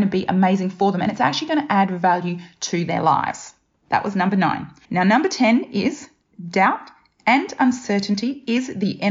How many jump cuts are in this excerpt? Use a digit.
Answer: 1